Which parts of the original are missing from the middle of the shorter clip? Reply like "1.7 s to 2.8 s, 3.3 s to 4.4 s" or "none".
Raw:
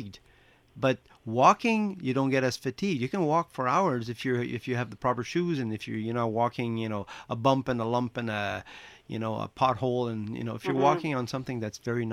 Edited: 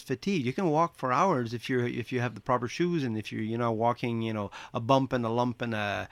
none